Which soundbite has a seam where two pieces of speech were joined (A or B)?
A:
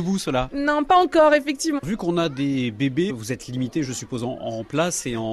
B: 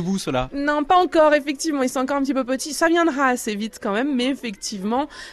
A